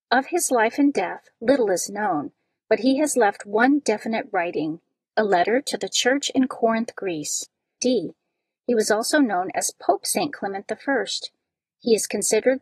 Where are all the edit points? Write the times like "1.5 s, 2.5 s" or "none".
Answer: 7.8 s